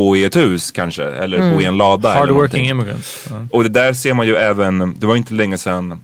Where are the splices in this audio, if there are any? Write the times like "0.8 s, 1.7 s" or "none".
none